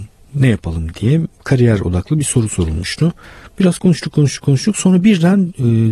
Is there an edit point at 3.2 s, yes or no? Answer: no